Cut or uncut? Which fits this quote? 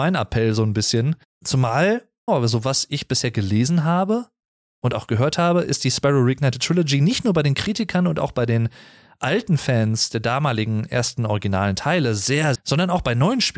cut